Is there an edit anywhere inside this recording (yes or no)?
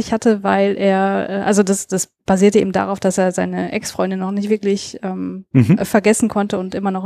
yes